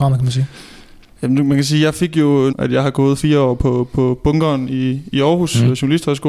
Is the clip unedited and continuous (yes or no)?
no